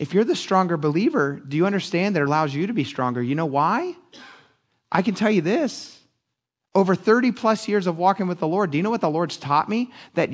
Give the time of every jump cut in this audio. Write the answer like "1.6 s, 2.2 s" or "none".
2.3 s